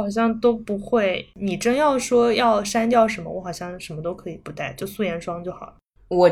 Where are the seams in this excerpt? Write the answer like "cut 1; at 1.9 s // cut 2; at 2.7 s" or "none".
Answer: none